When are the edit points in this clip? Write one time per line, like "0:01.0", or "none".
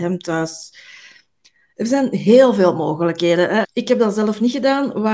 0:03.6